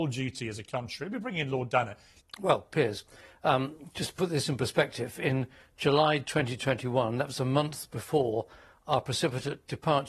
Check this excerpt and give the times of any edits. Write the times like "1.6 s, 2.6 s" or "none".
2.2 s